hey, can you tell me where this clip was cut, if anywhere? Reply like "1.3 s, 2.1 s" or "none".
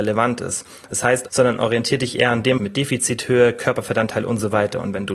1.3 s, 2.6 s